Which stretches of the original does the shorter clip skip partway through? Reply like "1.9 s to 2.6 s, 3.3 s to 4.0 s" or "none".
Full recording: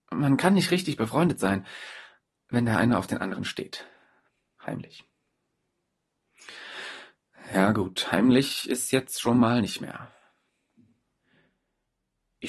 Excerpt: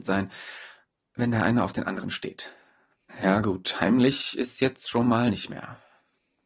4.4 s to 7.4 s